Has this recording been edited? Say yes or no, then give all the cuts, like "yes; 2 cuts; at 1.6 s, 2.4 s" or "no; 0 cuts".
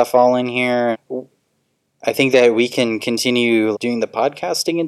yes; 2 cuts; at 0.9 s, 3.7 s